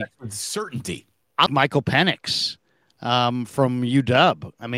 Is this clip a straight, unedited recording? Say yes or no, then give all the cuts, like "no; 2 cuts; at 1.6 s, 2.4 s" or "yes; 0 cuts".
no; 1 cut; at 1.5 s